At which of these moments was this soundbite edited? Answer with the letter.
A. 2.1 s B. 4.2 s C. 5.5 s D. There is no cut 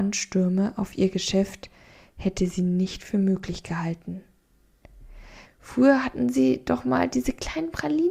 C